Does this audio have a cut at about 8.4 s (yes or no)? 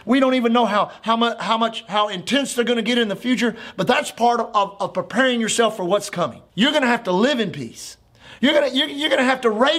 yes